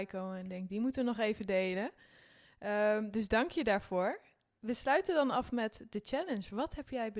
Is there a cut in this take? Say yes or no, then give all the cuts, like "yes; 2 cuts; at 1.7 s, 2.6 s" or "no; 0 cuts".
no; 0 cuts